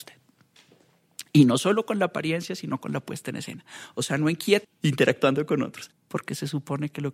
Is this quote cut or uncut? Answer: cut